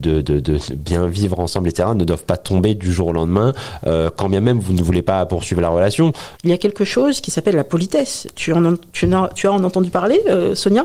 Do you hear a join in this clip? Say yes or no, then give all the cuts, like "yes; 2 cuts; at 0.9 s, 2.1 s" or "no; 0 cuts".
yes; 1 cut; at 6.4 s